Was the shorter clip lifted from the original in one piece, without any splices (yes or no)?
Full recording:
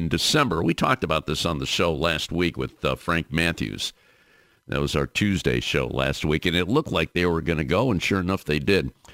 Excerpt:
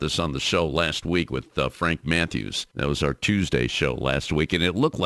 no